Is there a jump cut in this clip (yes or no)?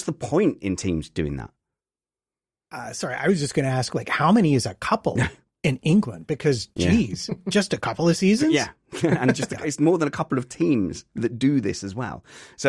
no